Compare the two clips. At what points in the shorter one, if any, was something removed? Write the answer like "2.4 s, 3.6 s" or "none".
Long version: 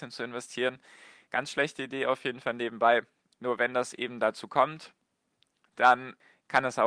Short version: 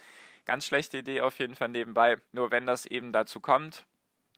2.3 s